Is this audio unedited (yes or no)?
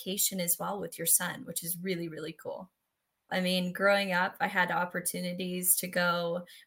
no